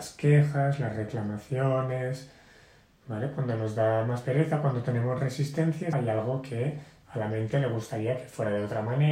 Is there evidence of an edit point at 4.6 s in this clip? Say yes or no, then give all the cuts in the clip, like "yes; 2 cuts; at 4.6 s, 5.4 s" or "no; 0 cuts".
no; 1 cut; at 5.9 s